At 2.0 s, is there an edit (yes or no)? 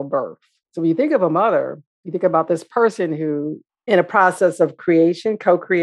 no